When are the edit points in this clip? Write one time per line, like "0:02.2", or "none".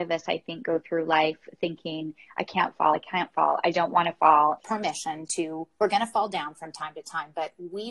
0:02.9
0:04.6